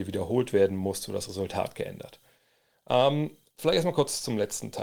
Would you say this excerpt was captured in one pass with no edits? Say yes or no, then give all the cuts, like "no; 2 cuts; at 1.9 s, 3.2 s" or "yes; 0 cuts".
yes; 0 cuts